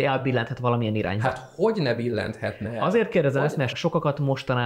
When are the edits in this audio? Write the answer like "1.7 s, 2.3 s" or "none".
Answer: 3.7 s